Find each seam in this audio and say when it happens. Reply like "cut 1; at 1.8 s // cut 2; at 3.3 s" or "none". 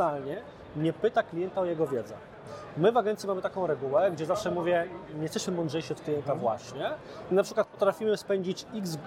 none